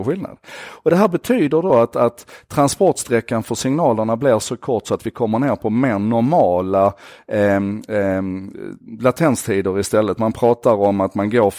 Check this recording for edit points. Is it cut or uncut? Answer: uncut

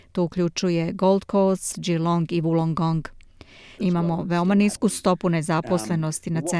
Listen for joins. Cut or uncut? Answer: cut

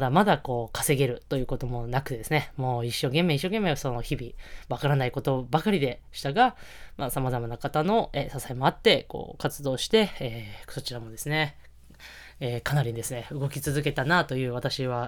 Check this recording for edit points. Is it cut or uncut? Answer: uncut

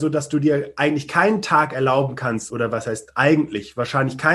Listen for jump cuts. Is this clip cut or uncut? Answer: uncut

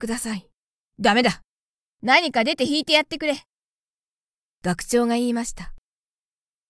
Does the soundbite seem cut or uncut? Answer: cut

